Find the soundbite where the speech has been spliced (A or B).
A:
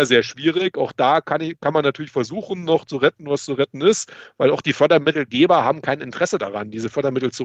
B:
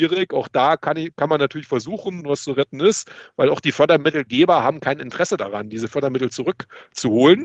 B